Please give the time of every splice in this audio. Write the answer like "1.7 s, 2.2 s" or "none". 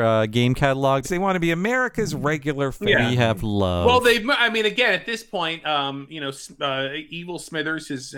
1.0 s

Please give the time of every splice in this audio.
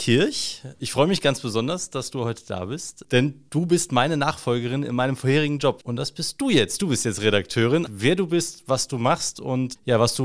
5.8 s, 7.9 s

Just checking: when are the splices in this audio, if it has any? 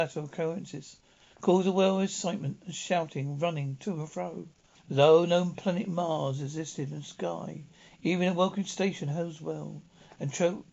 4.7 s

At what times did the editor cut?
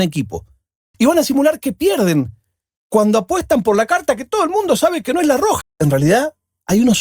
0.9 s, 5.6 s

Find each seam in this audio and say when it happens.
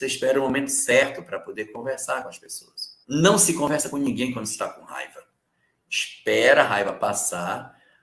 3.0 s

